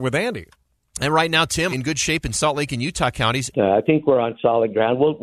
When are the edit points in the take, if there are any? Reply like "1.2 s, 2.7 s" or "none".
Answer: 1.7 s, 3.5 s